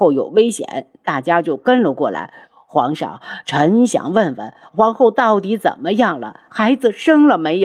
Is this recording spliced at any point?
no; 0 cuts

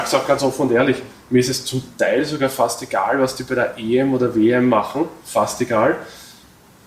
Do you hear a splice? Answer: no; 0 cuts

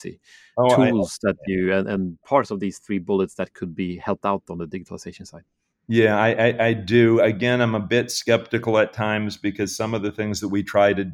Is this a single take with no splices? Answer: yes; 0 cuts

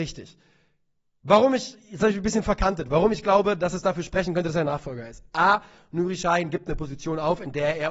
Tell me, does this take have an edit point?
no; 0 cuts

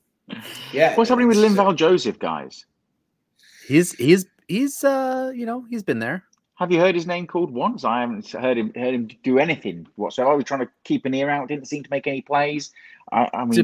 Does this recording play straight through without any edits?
yes; 0 cuts

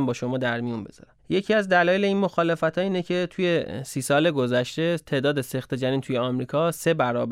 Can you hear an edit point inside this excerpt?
yes; 1 cut; at 1.2 s

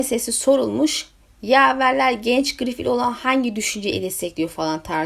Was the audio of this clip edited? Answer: no; 0 cuts

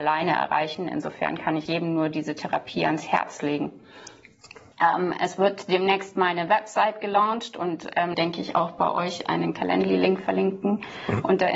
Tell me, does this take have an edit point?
yes; 3 cuts; at 1.7 s, 4.7 s, 8.1 s

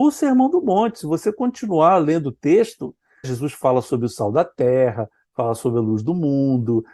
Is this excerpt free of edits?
no; 1 cut; at 3.2 s

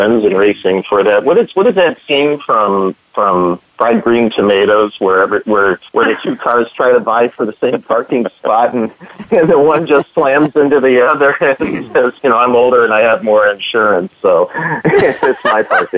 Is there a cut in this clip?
yes; 1 cut; at 5.9 s

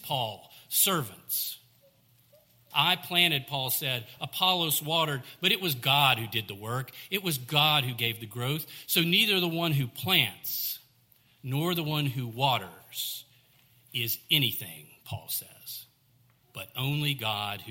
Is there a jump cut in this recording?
yes; 1 cut; at 2.7 s

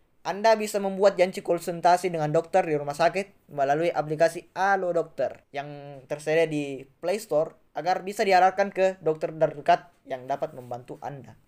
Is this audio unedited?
no; 2 cuts; at 5.4 s, 7.7 s

